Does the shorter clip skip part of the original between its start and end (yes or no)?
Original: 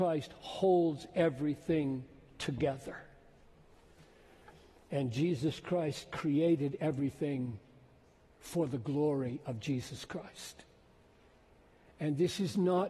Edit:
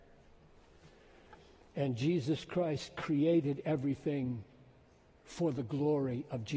no